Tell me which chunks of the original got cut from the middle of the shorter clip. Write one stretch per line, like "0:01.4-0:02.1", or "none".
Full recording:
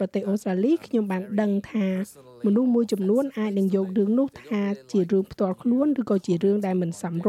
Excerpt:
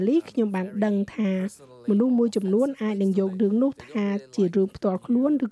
none